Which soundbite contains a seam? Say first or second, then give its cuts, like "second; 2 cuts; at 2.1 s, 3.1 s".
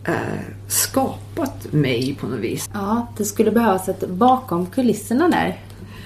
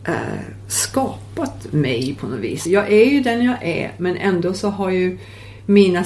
first; 1 cut; at 2.7 s